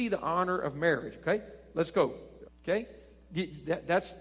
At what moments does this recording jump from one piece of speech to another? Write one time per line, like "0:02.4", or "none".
0:02.4